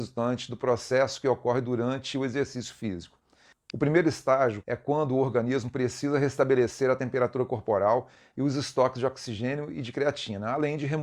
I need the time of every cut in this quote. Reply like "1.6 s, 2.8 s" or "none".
3.5 s, 4.6 s